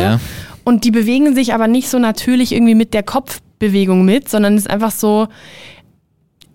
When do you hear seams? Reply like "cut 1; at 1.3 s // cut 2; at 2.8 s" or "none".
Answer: none

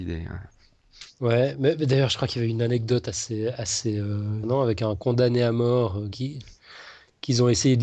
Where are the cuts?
cut 1; at 4.4 s // cut 2; at 6.1 s

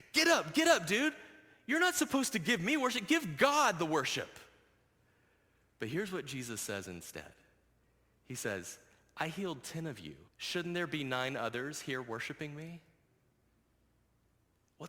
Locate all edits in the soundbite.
cut 1; at 10.3 s

